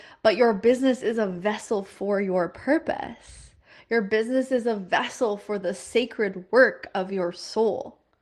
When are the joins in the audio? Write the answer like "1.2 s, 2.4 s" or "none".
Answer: none